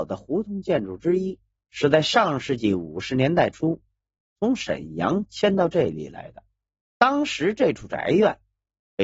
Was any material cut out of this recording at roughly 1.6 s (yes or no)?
yes